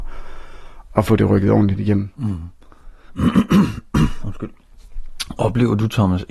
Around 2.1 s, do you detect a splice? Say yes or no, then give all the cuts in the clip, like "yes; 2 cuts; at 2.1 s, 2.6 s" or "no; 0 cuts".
no; 0 cuts